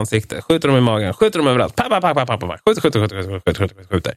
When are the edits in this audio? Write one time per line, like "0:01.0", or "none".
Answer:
none